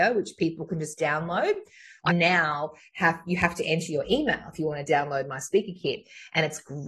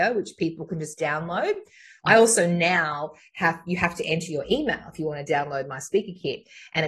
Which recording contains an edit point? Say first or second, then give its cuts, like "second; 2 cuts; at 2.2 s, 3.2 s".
first; 1 cut; at 2.1 s